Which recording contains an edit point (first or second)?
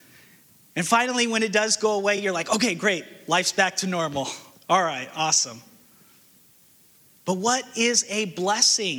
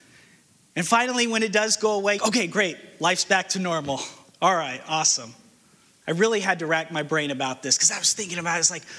second